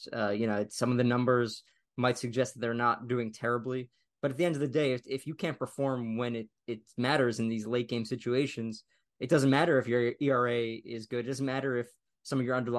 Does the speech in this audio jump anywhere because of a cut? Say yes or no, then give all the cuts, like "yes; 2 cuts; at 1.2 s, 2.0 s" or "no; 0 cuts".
no; 0 cuts